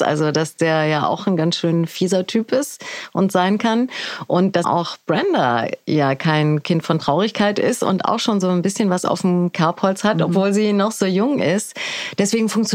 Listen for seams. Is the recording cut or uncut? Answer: cut